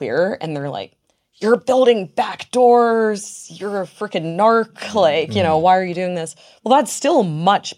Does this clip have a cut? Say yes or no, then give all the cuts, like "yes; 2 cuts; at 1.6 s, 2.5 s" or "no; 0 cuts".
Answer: no; 0 cuts